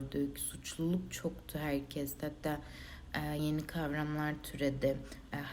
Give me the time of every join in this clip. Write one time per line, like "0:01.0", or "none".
0:03.4